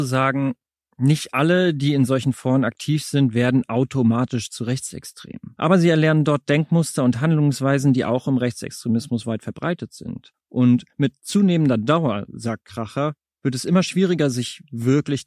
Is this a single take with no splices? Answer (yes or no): yes